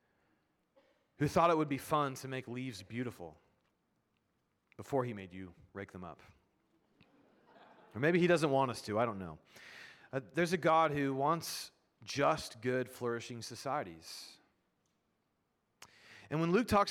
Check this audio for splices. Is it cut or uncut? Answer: uncut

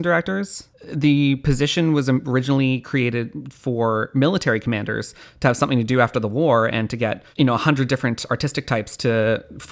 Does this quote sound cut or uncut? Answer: uncut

